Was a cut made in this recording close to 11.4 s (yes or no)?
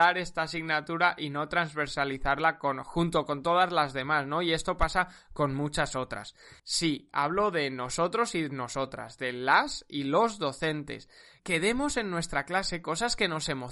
no